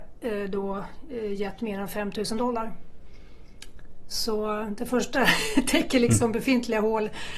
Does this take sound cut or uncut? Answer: uncut